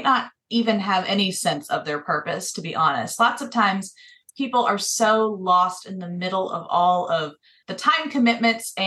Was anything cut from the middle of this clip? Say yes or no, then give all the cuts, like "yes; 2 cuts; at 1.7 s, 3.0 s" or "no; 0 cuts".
yes; 1 cut; at 7.6 s